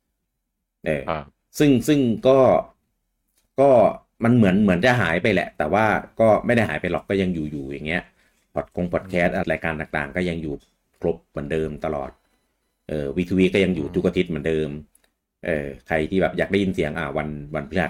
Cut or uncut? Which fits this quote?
cut